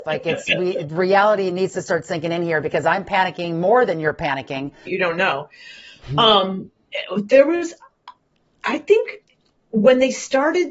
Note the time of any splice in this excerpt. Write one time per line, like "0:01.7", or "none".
0:04.9